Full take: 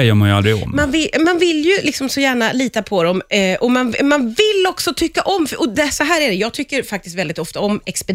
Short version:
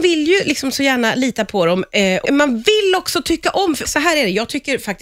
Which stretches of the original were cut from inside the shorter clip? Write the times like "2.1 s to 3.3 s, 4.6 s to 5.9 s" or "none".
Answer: 3.6 s to 4.0 s, 5.6 s to 5.9 s